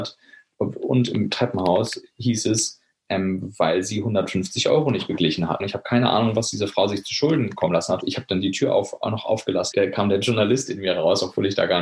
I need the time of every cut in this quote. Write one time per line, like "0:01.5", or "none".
0:05.6
0:08.0
0:09.7